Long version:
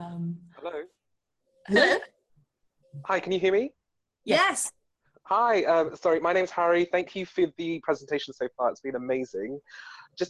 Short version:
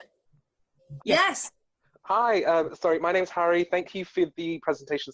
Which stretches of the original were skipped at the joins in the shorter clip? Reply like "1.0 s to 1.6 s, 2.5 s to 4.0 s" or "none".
3.0 s to 4.2 s

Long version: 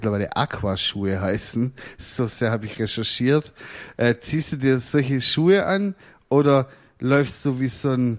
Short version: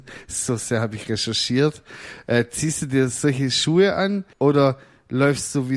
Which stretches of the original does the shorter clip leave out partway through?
6.0 s to 6.2 s

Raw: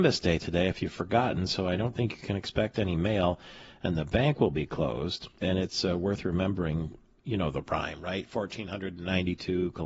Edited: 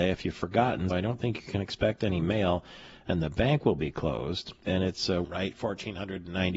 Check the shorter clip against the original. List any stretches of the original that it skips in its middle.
1.5 s to 1.7 s, 6.0 s to 8.0 s

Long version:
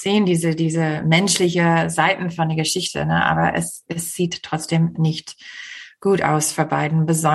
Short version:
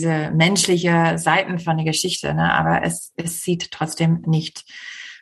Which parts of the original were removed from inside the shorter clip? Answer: none

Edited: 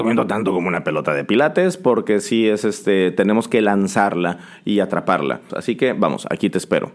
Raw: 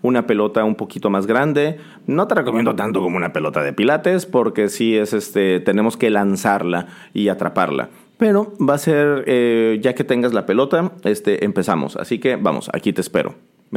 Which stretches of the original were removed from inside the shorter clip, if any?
8.0 s to 11.9 s

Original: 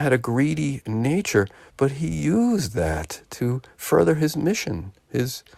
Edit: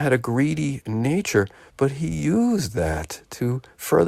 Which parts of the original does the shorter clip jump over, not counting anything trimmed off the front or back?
none

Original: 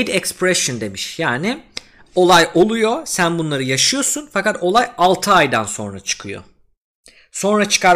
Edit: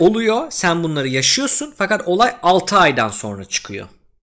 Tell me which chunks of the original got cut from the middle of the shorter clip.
none

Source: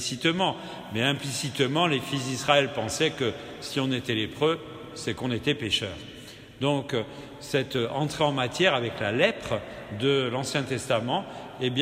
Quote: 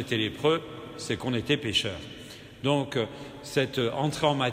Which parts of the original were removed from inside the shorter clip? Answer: none

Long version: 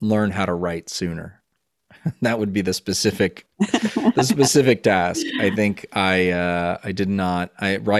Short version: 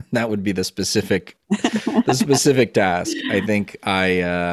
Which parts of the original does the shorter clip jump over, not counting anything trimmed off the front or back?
none

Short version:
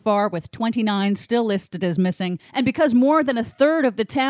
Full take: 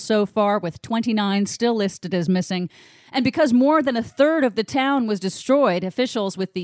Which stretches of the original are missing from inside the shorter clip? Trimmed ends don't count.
2.8 s to 3.1 s

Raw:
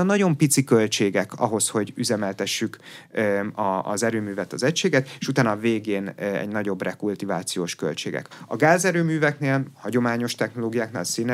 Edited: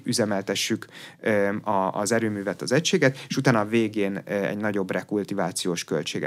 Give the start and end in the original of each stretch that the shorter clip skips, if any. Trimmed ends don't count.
none

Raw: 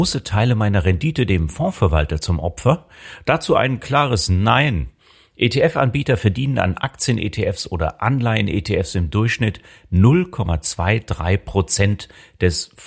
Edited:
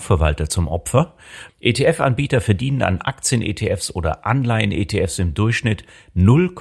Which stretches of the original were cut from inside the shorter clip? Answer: 3.2 s to 5.3 s

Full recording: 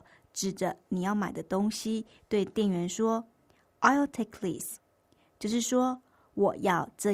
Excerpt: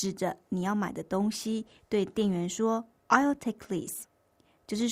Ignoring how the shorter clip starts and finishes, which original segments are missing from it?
3.4 s to 3.7 s

